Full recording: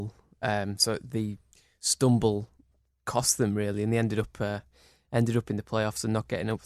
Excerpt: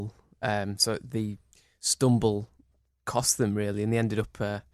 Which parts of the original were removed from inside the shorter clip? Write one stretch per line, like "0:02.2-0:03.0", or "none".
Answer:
none